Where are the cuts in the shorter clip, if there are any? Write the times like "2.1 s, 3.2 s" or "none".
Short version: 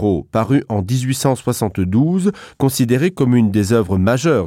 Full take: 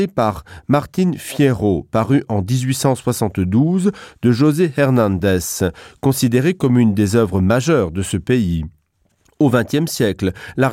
2.5 s